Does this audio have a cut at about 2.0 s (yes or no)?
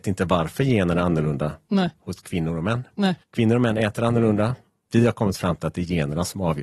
no